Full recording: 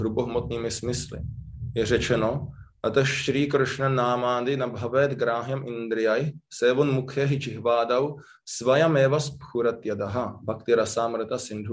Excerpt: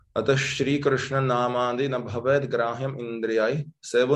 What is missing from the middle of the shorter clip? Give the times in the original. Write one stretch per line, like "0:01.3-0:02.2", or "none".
none